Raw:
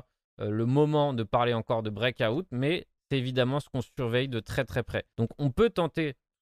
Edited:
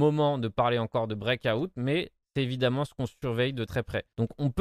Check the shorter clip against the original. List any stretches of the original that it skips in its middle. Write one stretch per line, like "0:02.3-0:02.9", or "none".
0:04.4-0:04.7